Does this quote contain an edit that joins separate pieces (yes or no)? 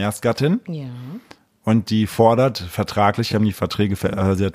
no